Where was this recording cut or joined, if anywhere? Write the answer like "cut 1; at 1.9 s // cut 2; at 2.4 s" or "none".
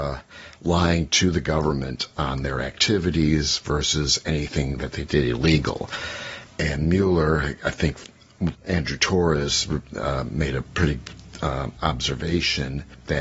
cut 1; at 8.5 s // cut 2; at 11.8 s